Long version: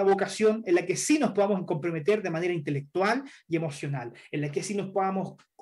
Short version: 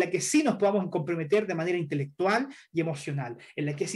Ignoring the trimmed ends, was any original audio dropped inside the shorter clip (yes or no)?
no